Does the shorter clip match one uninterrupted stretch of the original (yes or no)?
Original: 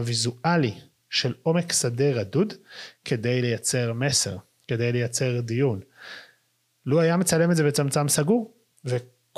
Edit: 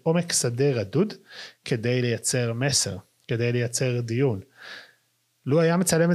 yes